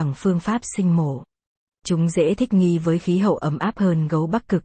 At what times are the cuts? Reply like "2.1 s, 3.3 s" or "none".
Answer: 1.8 s